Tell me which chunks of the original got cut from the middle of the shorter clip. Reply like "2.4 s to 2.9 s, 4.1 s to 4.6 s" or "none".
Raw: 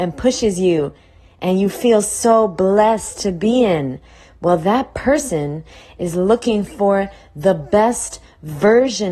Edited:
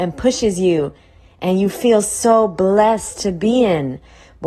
none

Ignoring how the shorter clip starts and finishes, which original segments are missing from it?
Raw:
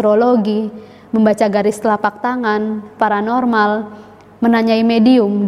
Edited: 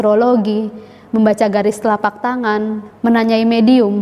2.9 s to 4.3 s

